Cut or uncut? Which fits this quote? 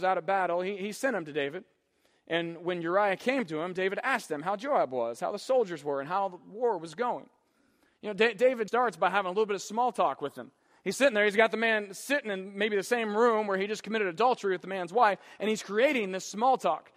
cut